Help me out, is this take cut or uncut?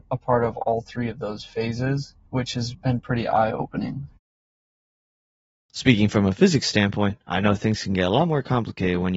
uncut